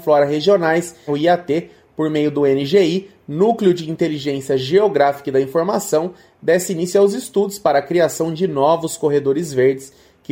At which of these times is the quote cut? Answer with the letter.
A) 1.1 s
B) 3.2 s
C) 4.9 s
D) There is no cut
A